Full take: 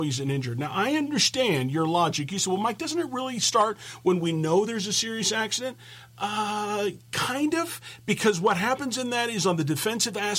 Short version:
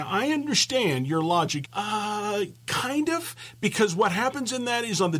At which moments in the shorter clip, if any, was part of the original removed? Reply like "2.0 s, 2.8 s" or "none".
1.6 s